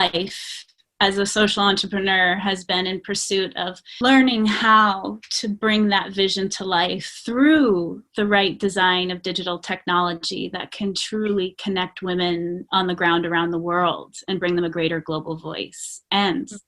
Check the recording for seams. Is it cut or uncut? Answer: uncut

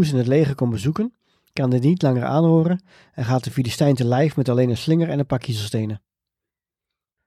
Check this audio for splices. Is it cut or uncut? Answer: uncut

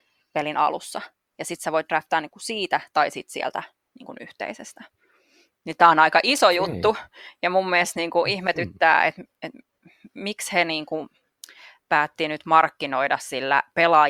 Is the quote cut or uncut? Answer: uncut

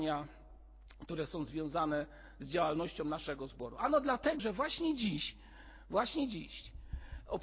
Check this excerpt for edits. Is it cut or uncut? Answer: cut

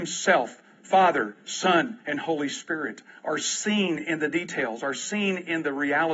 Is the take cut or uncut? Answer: uncut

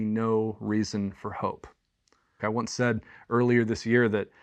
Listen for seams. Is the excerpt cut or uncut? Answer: cut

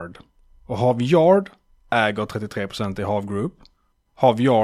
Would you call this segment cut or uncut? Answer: uncut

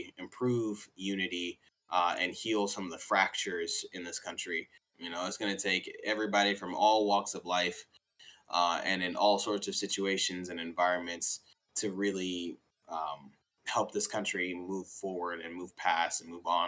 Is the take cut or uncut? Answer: cut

